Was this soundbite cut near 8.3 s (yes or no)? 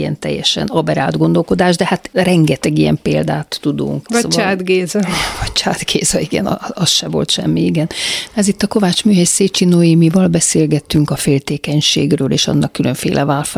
yes